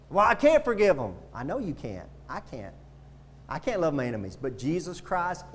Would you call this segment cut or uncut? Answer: uncut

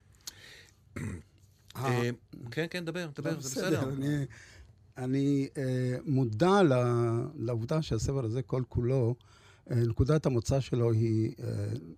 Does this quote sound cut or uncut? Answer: uncut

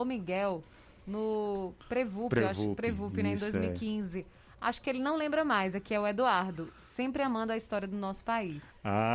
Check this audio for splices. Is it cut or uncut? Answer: cut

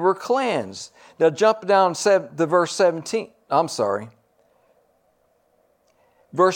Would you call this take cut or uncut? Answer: uncut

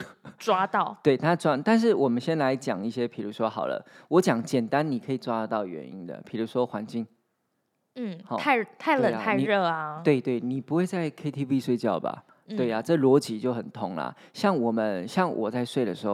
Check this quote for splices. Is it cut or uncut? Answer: uncut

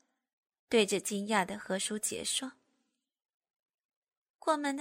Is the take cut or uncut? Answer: uncut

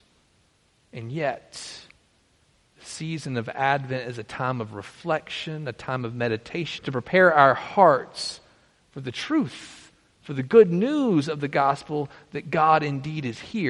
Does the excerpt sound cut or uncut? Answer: cut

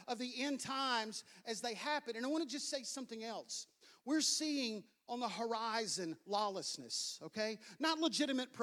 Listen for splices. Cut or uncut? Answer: uncut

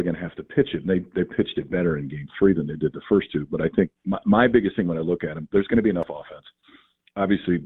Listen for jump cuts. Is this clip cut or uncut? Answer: uncut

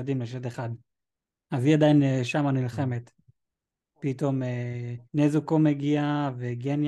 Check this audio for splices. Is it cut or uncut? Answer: cut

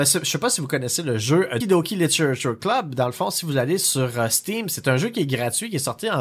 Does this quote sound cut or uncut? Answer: cut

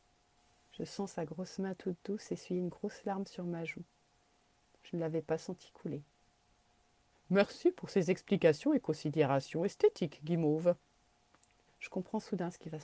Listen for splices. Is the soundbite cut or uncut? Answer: cut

